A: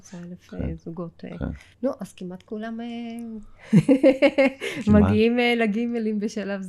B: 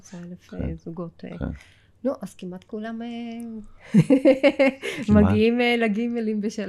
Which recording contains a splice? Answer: A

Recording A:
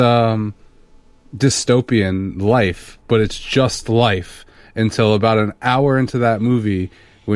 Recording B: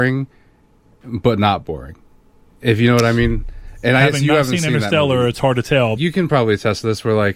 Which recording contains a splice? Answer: B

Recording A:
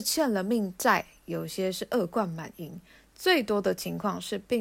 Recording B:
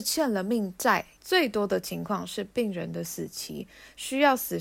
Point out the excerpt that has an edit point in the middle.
B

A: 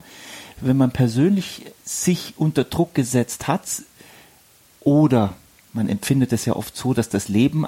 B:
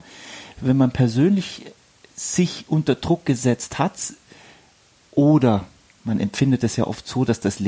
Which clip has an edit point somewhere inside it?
A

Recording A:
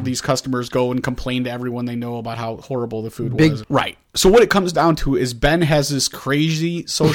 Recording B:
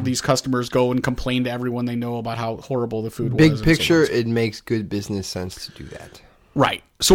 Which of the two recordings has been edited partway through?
A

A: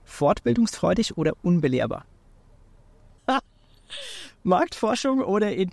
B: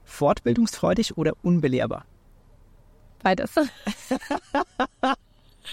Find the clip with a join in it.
A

